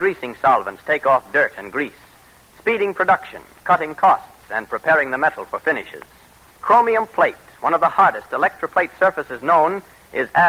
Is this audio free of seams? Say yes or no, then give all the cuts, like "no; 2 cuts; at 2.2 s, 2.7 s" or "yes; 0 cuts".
no; 1 cut; at 6.6 s